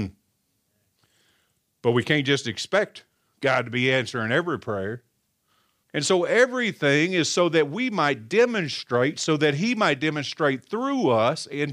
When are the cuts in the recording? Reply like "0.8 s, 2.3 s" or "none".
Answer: 5.8 s